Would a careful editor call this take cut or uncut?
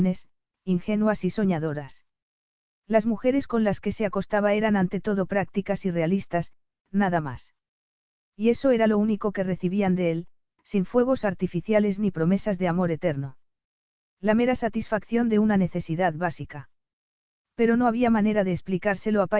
cut